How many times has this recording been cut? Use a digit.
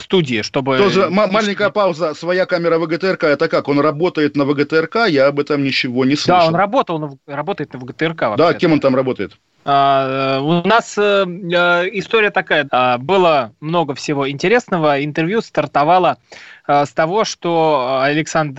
3